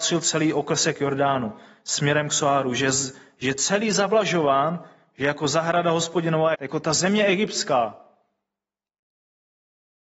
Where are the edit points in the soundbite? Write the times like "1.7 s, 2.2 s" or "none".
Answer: 6.5 s